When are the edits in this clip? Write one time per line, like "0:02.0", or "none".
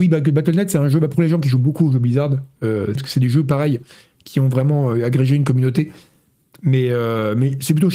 0:03.0